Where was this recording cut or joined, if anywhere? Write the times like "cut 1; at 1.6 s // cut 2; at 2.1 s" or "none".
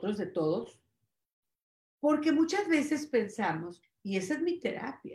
cut 1; at 3.8 s

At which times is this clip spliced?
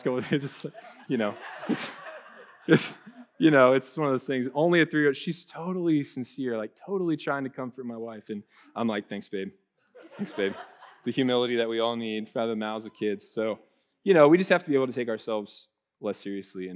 cut 1; at 1.0 s

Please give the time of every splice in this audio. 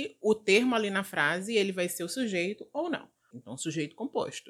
cut 1; at 3.3 s

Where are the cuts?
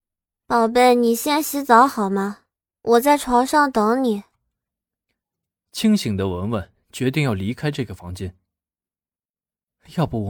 none

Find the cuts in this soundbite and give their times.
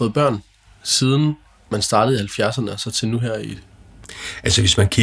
none

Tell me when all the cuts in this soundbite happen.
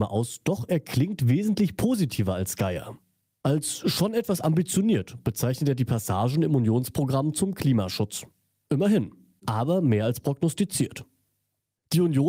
cut 1; at 9.4 s

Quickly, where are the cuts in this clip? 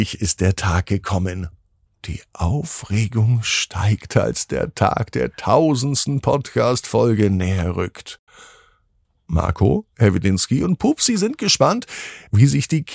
cut 1; at 1.9 s

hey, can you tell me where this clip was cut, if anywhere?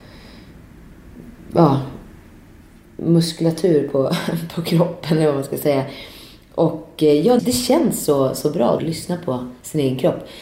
cut 1; at 7.4 s // cut 2; at 8.8 s

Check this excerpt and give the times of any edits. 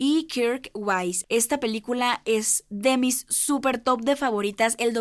cut 1; at 1.2 s

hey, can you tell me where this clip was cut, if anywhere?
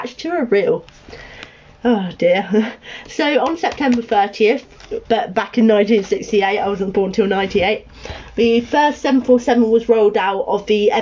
cut 1; at 5.1 s

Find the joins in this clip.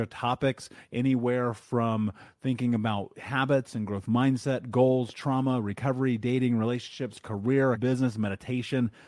cut 1; at 7.7 s

